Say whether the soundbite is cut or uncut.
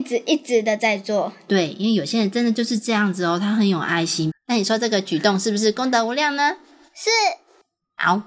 cut